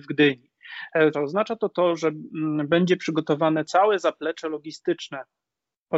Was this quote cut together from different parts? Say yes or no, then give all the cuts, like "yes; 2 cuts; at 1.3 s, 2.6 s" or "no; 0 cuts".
yes; 1 cut; at 1.1 s